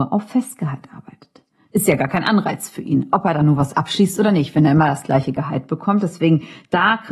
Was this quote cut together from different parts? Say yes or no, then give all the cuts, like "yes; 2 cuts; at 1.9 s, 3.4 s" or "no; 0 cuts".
no; 0 cuts